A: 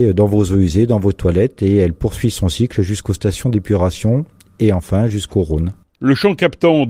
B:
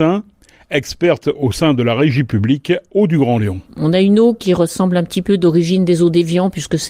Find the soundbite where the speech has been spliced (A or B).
B